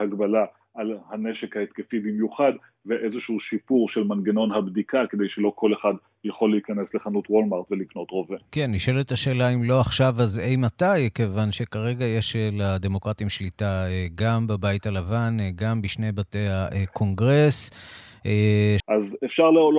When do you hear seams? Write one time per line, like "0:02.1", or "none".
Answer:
0:18.8